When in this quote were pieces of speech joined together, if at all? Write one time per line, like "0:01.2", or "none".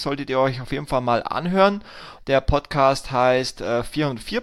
0:02.2